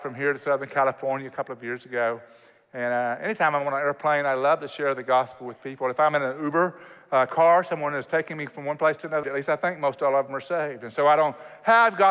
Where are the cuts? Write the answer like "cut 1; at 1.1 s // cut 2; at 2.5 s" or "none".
cut 1; at 9.2 s

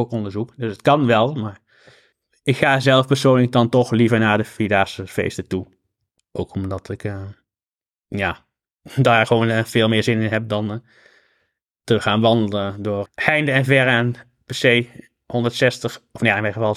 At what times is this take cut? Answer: cut 1; at 6.2 s // cut 2; at 13.1 s

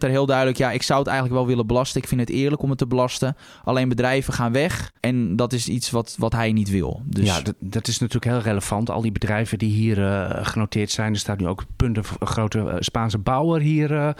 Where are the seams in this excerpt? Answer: cut 1; at 5.0 s

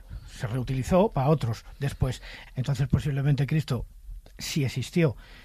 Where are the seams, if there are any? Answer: cut 1; at 2.5 s

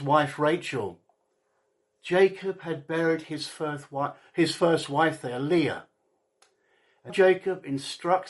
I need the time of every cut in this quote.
cut 1; at 7.1 s

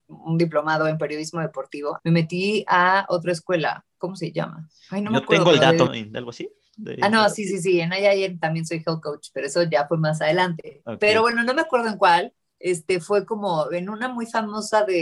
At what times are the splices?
cut 1; at 2.0 s // cut 2; at 5.9 s

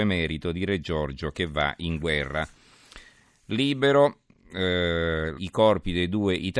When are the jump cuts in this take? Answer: cut 1; at 5.4 s

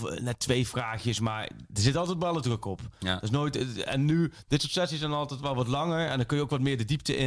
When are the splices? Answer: none

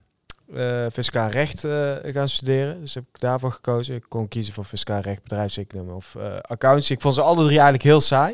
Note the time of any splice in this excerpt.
none

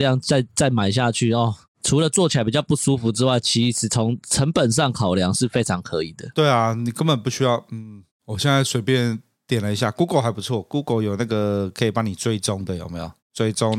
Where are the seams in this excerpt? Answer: none

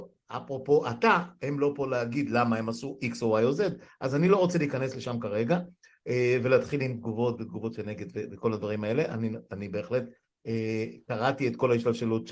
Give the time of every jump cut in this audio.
none

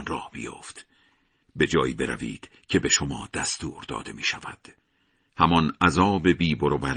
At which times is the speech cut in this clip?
cut 1; at 1.4 s // cut 2; at 5.3 s

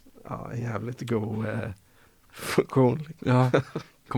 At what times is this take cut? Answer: none

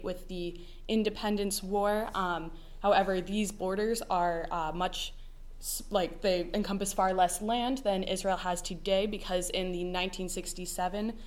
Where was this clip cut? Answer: none

